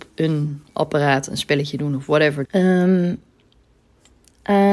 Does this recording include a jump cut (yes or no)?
yes